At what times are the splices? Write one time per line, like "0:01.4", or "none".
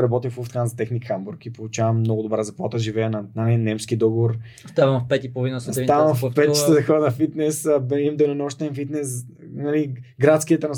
none

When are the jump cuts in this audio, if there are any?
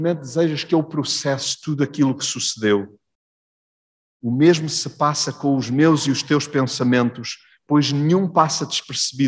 none

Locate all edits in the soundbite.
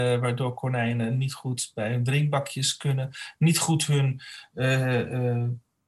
none

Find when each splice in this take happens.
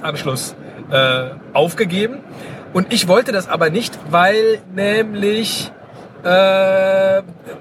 none

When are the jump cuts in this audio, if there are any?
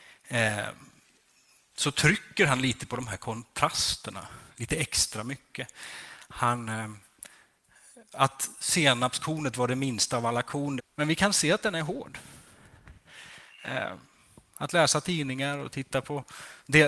0:10.8

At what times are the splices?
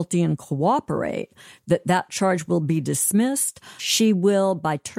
0:03.8

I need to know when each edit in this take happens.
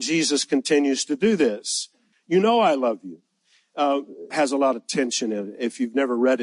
0:02.1
0:04.3

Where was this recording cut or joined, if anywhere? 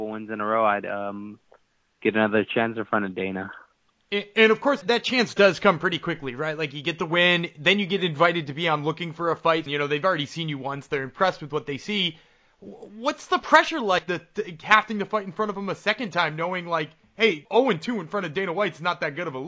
0:04.8
0:09.7
0:17.4

